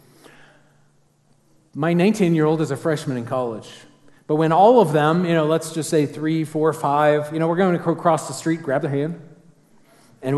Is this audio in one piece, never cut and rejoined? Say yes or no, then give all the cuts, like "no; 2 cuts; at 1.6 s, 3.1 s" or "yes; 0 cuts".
yes; 0 cuts